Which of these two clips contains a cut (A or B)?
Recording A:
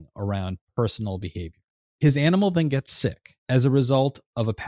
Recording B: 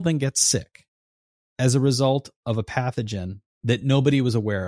A